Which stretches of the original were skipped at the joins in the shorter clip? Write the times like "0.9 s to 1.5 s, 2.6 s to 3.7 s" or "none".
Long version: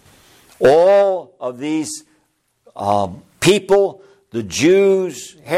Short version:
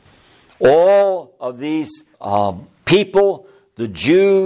2.1 s to 2.7 s